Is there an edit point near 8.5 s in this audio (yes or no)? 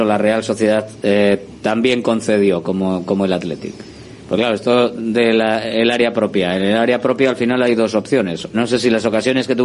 yes